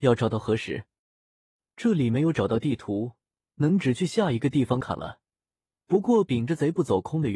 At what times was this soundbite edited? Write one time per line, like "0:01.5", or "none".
0:04.8